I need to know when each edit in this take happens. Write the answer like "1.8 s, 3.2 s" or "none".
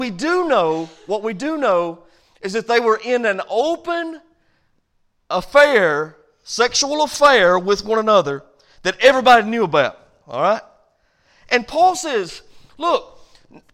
none